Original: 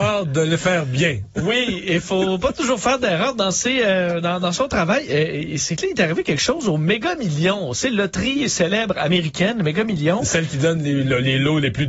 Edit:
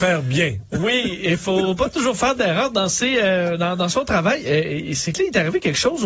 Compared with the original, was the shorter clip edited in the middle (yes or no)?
no